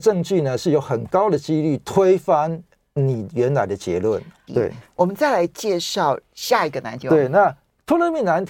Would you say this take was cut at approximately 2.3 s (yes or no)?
no